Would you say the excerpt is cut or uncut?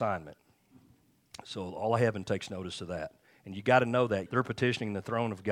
cut